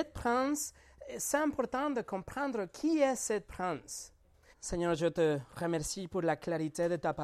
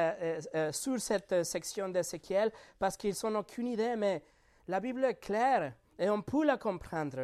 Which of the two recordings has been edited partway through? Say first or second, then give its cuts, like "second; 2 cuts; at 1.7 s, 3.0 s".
first; 1 cut; at 4.5 s